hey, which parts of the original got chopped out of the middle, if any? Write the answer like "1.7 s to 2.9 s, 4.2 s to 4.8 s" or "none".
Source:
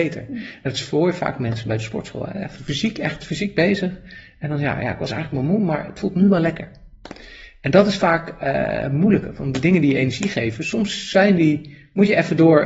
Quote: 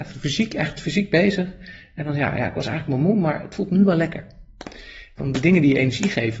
7.6 s to 9.4 s